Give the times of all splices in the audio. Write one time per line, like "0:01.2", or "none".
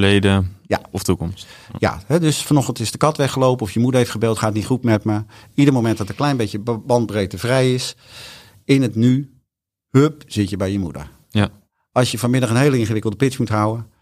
none